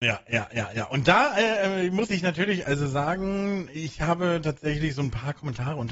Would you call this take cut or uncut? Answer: cut